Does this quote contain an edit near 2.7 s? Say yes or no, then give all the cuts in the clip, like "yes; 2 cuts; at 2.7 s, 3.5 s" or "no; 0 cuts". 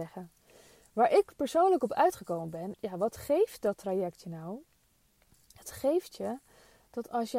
yes; 1 cut; at 2.7 s